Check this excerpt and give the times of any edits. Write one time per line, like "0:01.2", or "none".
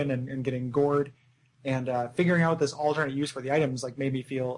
none